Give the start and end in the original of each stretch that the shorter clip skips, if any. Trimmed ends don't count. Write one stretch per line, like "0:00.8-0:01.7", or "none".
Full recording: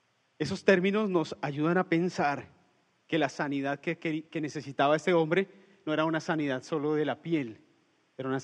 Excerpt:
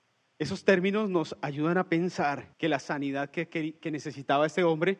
0:02.5-0:03.0